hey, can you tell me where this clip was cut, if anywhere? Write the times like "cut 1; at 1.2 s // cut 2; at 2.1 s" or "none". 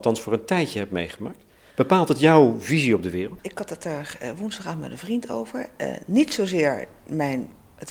none